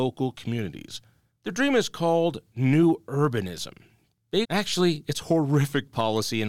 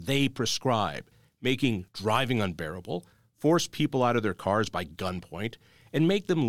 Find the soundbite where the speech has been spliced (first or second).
first